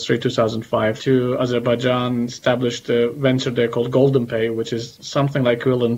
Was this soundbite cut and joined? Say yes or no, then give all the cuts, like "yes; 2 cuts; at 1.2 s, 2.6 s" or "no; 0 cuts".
yes; 1 cut; at 1.0 s